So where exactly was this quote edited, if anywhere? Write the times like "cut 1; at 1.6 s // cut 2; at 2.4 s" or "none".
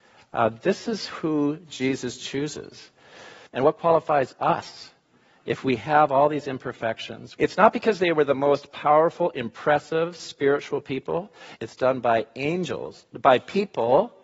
cut 1; at 3.5 s // cut 2; at 7.4 s // cut 3; at 11.6 s